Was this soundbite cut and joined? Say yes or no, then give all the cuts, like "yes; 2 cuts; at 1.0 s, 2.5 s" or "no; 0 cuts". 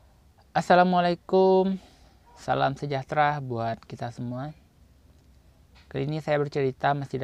no; 0 cuts